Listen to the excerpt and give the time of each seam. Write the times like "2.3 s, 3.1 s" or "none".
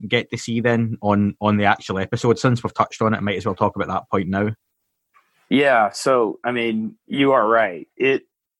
none

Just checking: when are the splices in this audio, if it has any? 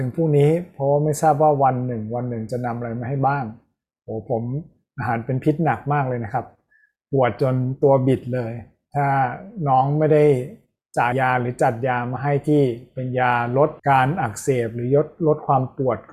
11.1 s, 13.8 s

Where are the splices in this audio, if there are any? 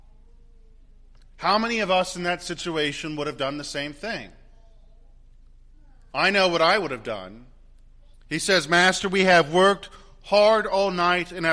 8.1 s

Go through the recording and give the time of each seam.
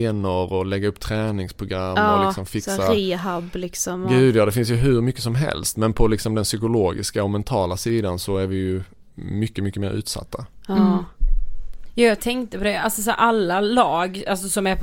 none

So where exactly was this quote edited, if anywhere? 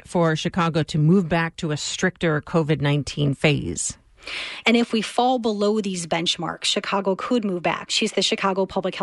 4.6 s, 7.9 s

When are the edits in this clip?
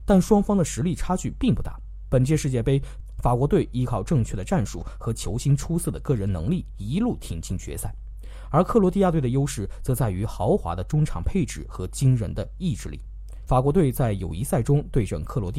13.5 s

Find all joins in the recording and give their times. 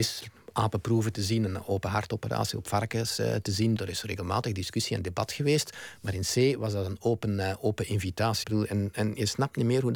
3.8 s, 8.4 s

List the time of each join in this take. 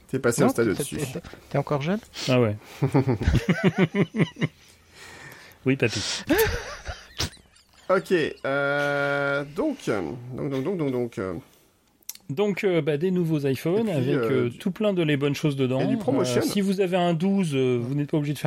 none

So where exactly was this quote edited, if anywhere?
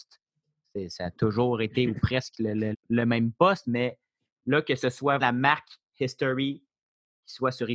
2.7 s, 5.2 s

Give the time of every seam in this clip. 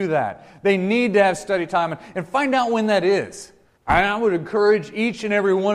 3.8 s

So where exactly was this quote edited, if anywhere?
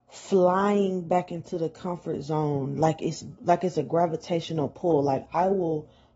none

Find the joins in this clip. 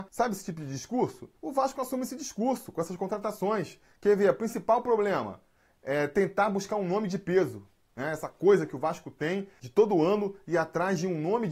1.4 s

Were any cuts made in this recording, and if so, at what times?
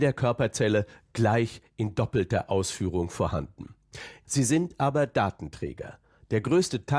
4.2 s

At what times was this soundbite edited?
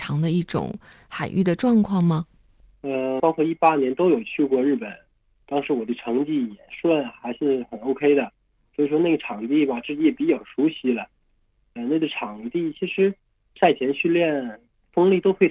3.2 s

